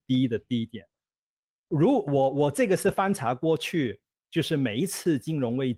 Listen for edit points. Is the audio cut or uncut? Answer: uncut